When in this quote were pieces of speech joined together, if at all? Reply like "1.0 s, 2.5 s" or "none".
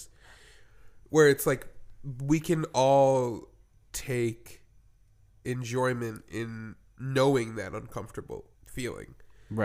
8.5 s